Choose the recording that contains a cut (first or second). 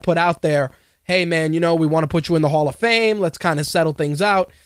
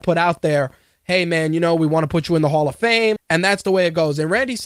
second